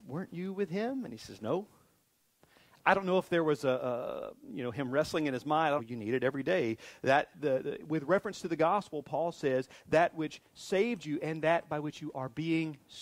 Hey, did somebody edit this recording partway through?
yes; 1 cut; at 5.8 s

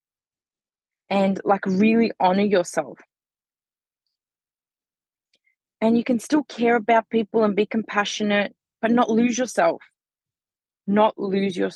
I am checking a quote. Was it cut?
no; 0 cuts

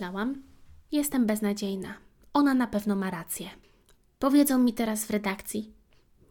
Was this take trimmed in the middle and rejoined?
no; 0 cuts

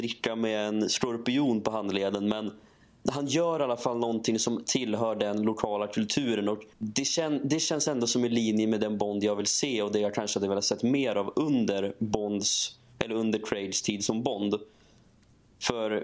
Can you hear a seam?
yes; 1 cut; at 6.7 s

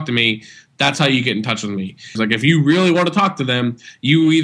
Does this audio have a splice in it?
yes; 1 cut; at 2.2 s

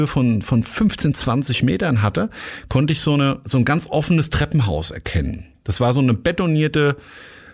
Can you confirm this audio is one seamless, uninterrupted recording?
yes; 0 cuts

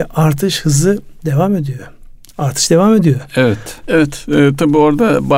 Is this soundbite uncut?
no; 1 cut; at 3.8 s

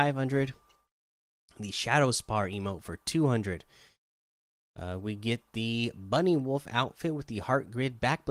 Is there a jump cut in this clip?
no; 0 cuts

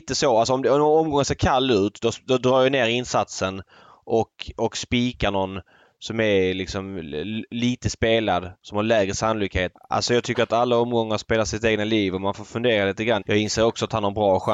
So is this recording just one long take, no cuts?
no; 2 cuts; at 9.7 s, 13.2 s

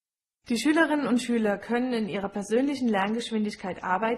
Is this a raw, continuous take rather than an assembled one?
yes; 0 cuts

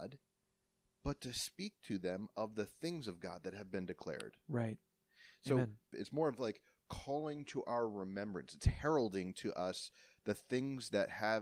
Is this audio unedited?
no; 1 cut; at 5.9 s

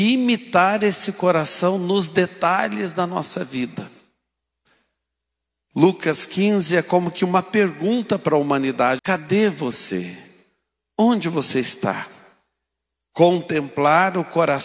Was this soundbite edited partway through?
yes; 2 cuts; at 9.0 s, 13.0 s

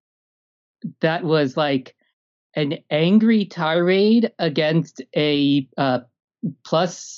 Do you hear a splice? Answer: no; 0 cuts

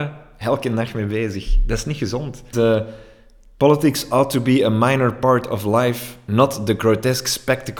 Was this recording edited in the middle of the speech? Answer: yes; 1 cut; at 2.5 s

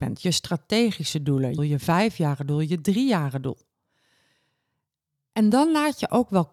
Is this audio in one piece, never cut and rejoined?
no; 1 cut; at 1.6 s

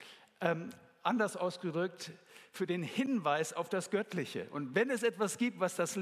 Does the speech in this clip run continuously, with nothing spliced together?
yes; 0 cuts

